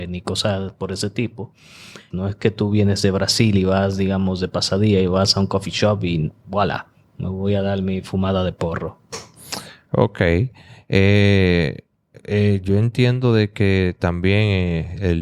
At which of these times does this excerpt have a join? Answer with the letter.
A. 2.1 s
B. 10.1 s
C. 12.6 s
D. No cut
A